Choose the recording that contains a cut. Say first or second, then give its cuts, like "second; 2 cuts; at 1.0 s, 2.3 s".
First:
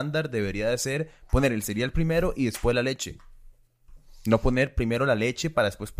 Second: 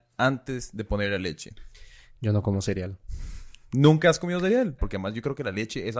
second; 1 cut; at 4.8 s